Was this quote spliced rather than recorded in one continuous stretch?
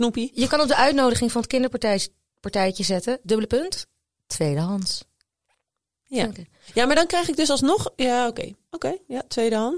yes; 1 cut; at 3.2 s

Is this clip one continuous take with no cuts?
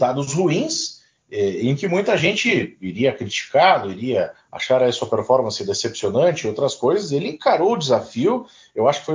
yes; 0 cuts

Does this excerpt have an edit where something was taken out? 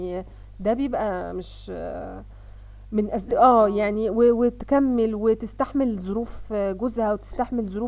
yes; 1 cut; at 3.3 s

